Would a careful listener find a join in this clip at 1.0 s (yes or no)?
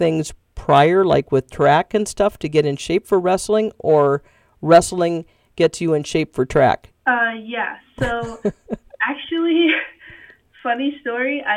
no